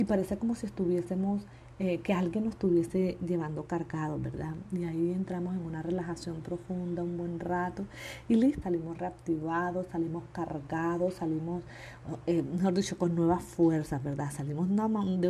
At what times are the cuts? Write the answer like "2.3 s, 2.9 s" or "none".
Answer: 8.6 s